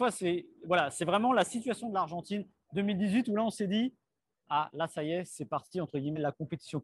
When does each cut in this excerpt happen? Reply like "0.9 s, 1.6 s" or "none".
none